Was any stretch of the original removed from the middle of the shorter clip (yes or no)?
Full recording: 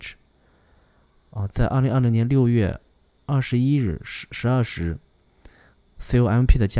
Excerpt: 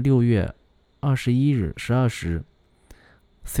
yes